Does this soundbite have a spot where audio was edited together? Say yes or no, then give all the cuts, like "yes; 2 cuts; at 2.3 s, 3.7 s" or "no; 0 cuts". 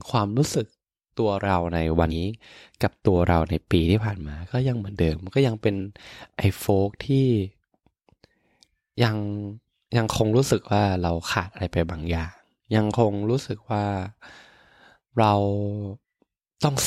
yes; 1 cut; at 2.1 s